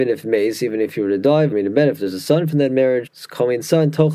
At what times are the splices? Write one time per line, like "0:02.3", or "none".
0:01.5
0:03.1